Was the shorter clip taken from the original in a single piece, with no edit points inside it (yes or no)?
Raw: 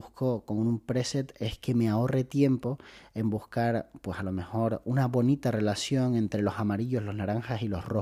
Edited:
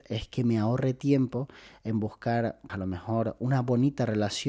no